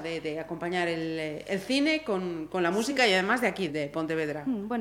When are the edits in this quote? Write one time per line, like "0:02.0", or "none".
0:03.7